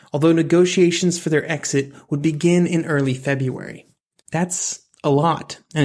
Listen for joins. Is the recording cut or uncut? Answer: cut